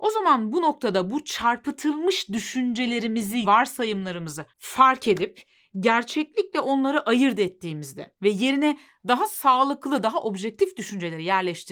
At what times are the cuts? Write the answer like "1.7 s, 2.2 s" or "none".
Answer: 3.4 s, 4.5 s